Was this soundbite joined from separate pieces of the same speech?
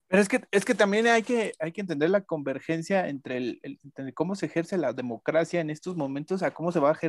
no; 0 cuts

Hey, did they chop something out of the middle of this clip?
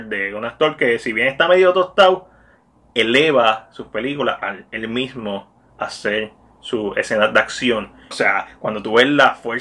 yes; 1 cut; at 8.1 s

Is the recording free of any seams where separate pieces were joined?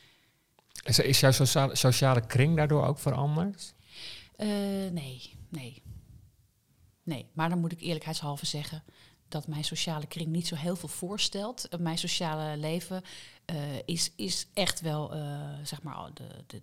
yes; 0 cuts

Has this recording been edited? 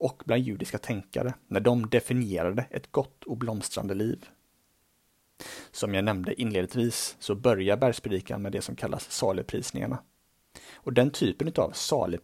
no; 0 cuts

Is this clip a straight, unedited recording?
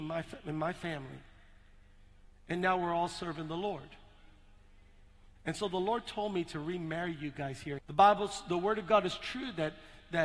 no; 2 cuts; at 5.4 s, 7.8 s

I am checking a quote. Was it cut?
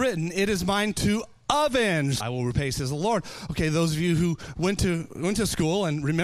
yes; 1 cut; at 2.2 s

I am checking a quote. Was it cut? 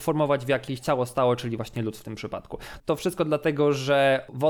yes; 1 cut; at 2.8 s

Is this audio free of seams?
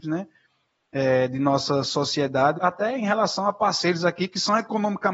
no; 1 cut; at 2.6 s

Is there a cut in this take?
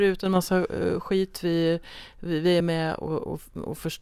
no; 0 cuts

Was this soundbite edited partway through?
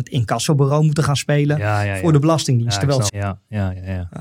yes; 1 cut; at 3.1 s

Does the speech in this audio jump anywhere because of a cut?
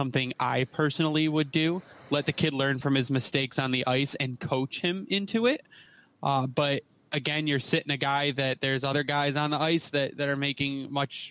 no; 0 cuts

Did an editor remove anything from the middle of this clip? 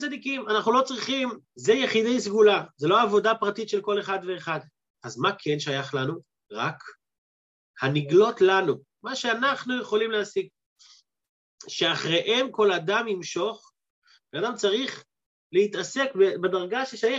yes; 2 cuts; at 1.4 s, 4.9 s

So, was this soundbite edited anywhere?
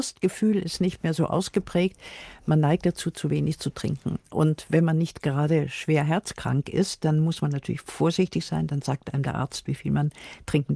no; 0 cuts

